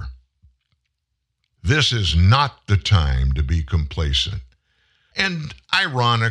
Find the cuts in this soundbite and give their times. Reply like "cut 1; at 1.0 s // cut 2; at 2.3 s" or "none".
cut 1; at 1.6 s // cut 2; at 5.1 s